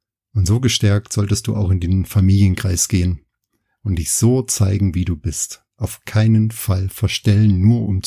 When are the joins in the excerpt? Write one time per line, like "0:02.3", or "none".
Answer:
none